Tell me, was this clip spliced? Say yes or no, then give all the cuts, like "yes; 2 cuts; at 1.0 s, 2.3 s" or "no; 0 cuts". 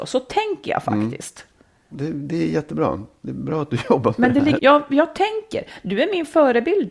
yes; 2 cuts; at 1.9 s, 4.6 s